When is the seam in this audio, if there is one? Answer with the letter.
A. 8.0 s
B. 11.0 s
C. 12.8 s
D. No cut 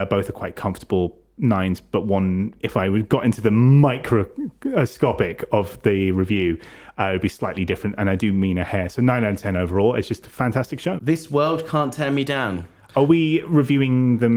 B